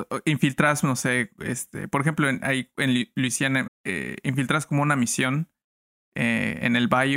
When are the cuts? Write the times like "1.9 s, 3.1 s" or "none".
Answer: 3.7 s